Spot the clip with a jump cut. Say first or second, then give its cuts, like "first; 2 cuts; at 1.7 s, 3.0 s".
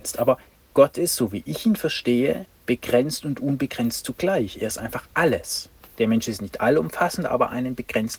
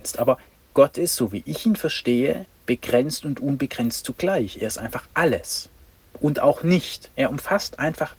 first; 1 cut; at 5.8 s